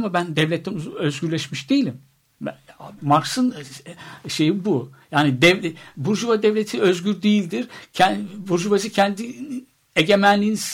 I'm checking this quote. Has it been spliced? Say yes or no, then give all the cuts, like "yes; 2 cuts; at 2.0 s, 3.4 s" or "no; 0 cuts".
yes; 1 cut; at 3.0 s